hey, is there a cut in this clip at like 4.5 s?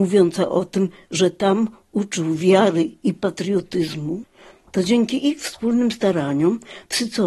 yes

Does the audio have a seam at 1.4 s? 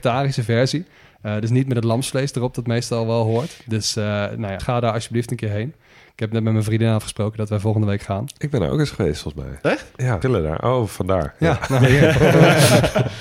no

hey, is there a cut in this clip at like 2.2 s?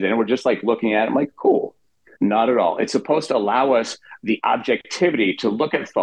yes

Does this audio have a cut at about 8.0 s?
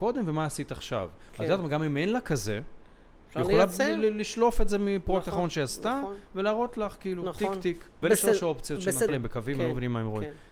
yes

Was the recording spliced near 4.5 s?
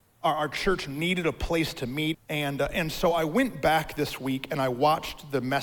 no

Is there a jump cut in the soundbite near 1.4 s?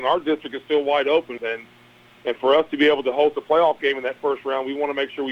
yes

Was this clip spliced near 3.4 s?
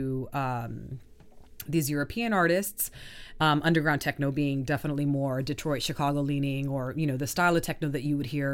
yes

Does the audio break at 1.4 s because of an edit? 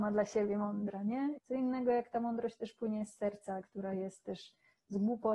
yes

